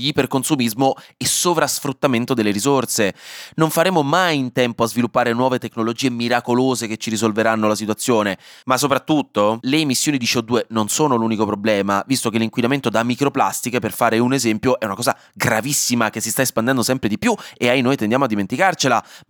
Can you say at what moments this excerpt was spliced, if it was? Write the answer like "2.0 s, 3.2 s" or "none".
none

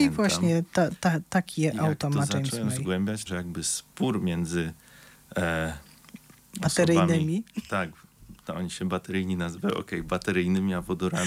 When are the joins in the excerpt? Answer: 3.3 s

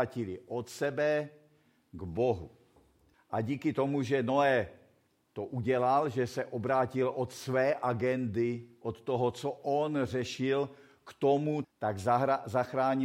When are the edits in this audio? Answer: 3.1 s, 11.6 s

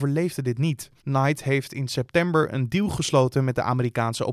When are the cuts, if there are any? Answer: 1.0 s

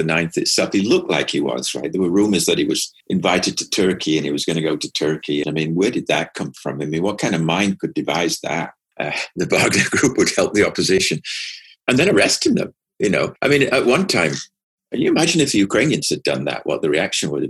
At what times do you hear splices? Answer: 5.4 s

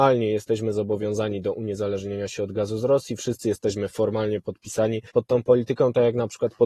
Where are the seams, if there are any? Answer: 5.1 s

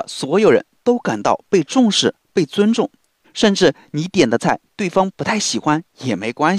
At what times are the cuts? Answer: 3.2 s

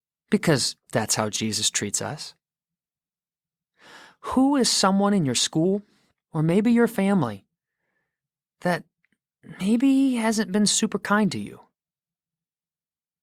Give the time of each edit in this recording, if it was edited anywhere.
6.2 s

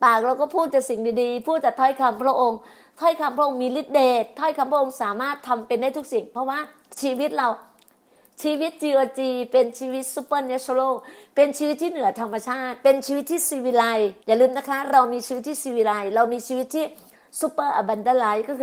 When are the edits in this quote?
14.2 s

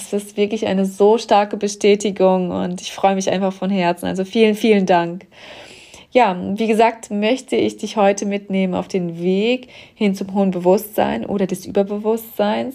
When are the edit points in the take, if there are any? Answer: none

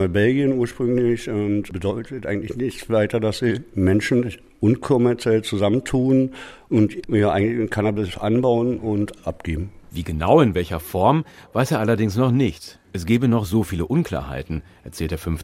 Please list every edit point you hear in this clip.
none

